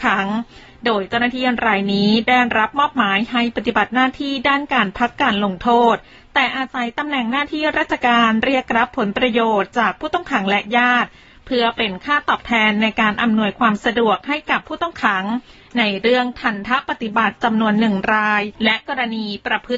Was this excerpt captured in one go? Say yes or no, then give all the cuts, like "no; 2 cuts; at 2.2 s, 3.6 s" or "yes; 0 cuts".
no; 1 cut; at 18.5 s